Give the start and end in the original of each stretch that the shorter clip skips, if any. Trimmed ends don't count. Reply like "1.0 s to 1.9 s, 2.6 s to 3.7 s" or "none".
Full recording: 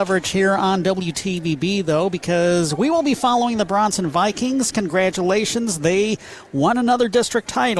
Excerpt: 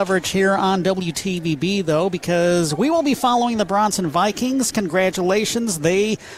none